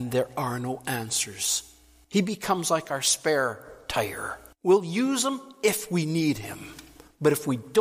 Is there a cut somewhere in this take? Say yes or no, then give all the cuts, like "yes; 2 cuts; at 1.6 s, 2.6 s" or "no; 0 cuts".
yes; 2 cuts; at 2.0 s, 4.5 s